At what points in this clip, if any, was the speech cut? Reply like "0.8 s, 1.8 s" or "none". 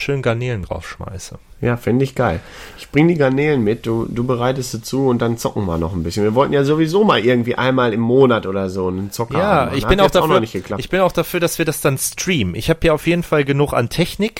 none